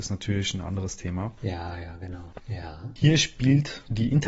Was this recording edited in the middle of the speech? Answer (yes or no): yes